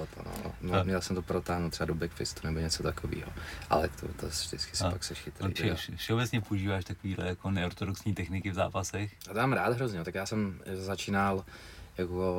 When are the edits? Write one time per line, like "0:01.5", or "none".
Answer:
0:05.6